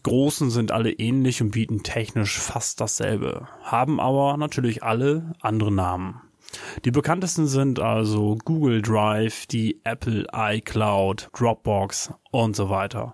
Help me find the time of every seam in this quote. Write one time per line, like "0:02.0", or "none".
0:11.3